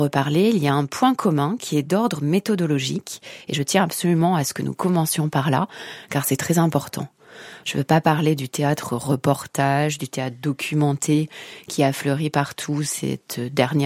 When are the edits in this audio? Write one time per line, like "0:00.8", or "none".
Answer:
0:07.6